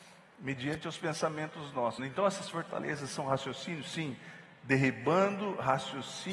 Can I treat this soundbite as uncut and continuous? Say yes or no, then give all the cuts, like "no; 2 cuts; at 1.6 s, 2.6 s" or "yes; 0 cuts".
no; 1 cut; at 2.0 s